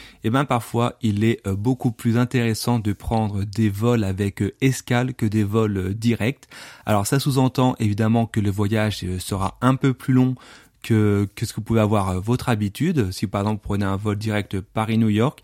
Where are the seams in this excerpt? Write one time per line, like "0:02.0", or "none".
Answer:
none